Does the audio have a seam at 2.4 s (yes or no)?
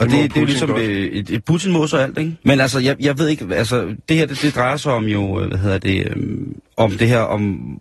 yes